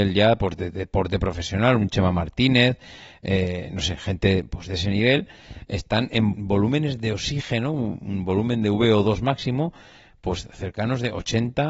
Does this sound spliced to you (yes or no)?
yes